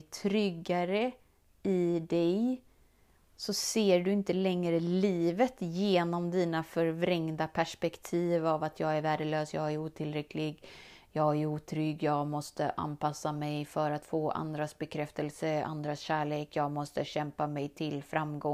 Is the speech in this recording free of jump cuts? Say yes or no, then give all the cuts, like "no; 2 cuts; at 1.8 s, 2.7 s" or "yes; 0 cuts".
yes; 0 cuts